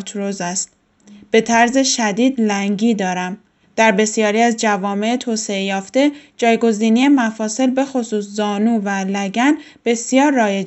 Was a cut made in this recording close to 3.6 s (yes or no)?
yes